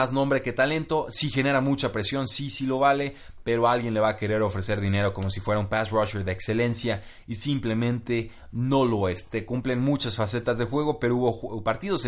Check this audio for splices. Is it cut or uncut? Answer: uncut